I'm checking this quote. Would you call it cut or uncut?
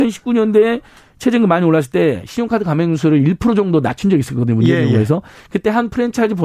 uncut